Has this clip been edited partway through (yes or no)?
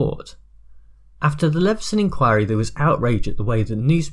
no